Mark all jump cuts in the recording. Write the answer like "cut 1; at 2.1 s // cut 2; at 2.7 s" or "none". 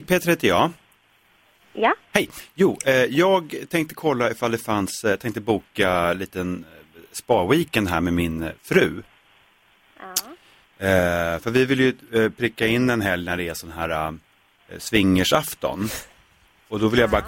cut 1; at 1.6 s // cut 2; at 10.6 s

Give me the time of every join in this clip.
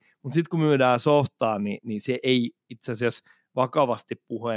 none

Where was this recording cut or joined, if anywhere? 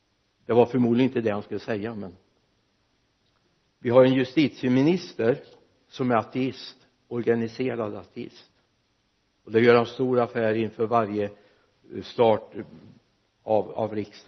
none

